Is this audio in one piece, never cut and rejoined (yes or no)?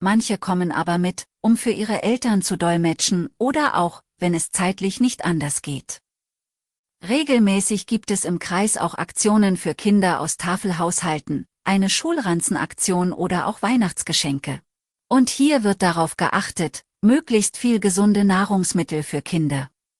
no